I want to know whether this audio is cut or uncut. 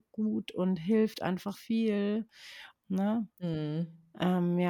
cut